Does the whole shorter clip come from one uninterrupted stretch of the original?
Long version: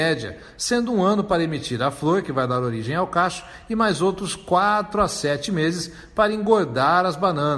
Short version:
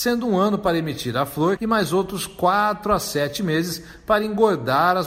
no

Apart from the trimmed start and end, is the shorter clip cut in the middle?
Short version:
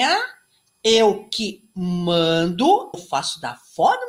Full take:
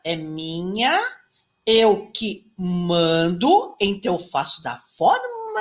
yes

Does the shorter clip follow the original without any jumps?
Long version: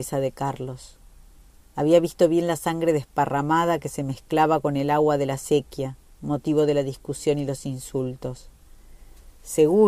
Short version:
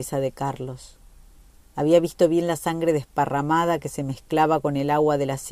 yes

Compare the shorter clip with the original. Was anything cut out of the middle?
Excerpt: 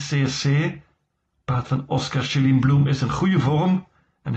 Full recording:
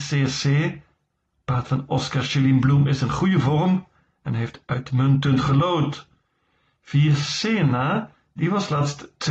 no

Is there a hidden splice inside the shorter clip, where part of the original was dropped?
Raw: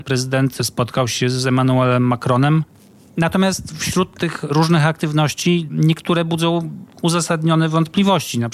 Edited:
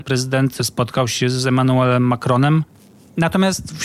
no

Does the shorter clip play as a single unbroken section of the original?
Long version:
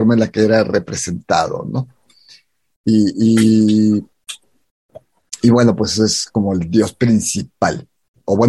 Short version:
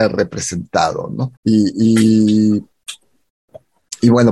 no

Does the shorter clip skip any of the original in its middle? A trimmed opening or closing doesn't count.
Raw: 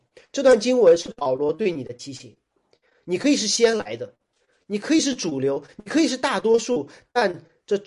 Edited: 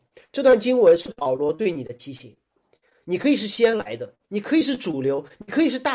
yes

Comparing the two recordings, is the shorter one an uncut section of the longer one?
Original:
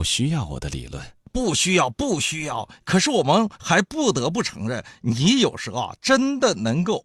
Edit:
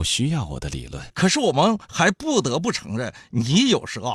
no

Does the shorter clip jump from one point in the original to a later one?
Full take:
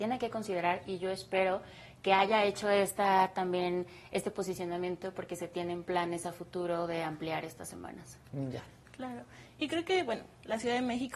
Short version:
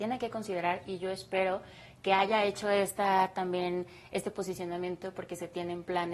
no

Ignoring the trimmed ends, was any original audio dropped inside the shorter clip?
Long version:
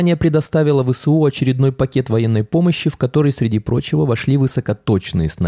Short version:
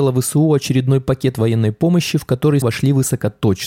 yes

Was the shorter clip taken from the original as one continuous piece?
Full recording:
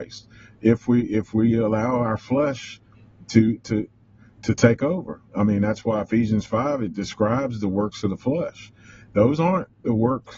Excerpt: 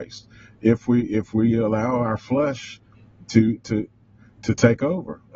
yes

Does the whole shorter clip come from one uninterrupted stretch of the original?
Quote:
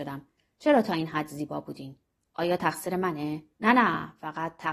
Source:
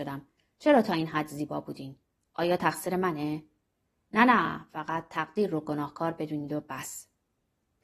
no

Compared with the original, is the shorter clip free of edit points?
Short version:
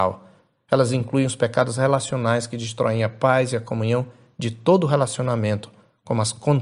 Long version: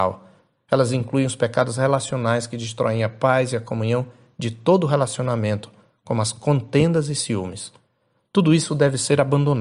yes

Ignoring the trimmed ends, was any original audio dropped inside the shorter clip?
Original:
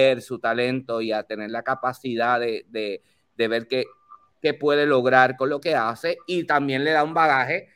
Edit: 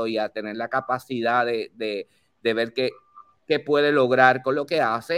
no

